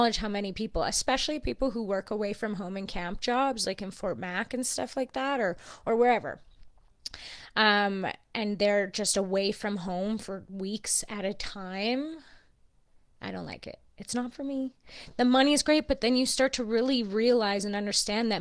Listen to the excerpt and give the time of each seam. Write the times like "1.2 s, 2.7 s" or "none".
none